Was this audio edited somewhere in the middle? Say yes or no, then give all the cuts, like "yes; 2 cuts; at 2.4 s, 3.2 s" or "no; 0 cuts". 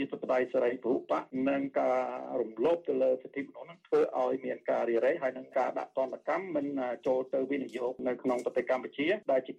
no; 0 cuts